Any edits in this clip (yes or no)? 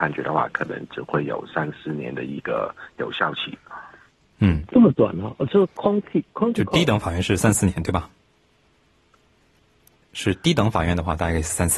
yes